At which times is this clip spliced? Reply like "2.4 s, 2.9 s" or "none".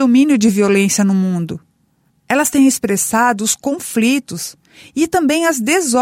2.1 s